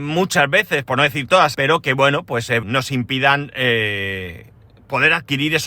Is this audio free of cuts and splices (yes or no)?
no